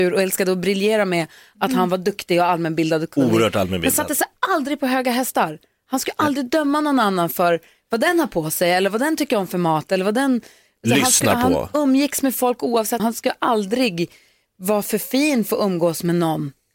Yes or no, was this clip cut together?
yes